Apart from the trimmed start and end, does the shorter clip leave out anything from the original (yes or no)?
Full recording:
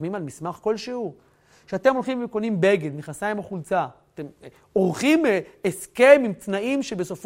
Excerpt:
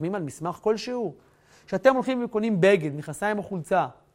no